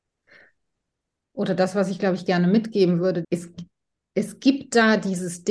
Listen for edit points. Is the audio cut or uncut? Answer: cut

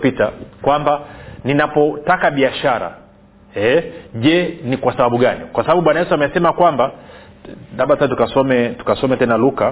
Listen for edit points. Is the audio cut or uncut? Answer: uncut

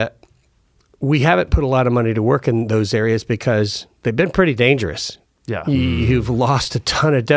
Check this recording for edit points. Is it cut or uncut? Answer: uncut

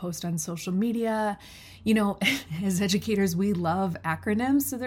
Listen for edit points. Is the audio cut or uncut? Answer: uncut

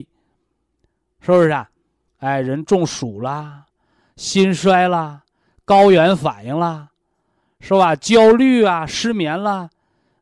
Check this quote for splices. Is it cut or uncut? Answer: uncut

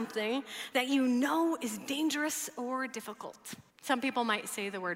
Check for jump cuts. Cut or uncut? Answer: cut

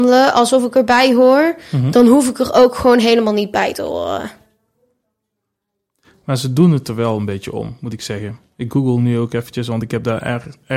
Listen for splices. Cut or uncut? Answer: uncut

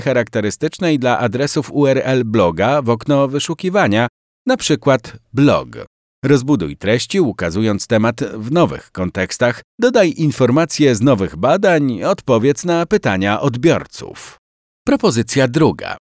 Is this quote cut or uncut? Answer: uncut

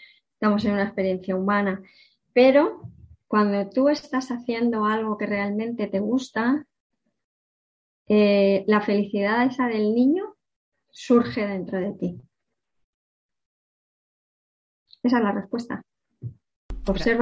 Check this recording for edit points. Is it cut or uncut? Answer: uncut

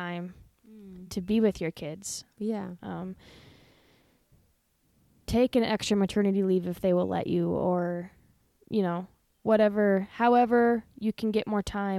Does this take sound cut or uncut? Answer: uncut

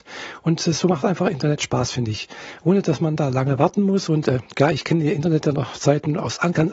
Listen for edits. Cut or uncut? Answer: uncut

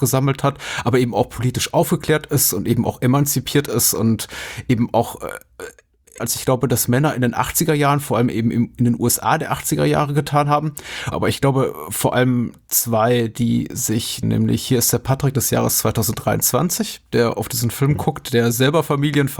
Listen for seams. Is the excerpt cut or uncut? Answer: cut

